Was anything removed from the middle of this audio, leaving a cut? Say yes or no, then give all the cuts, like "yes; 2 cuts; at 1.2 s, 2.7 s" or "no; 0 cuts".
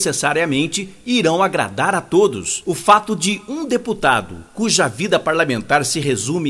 yes; 1 cut; at 2.6 s